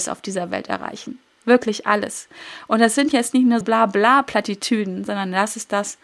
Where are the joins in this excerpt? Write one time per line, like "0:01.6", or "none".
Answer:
0:03.6